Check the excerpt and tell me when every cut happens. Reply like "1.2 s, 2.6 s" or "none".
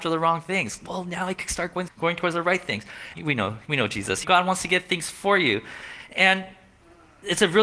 1.9 s, 3.1 s, 4.2 s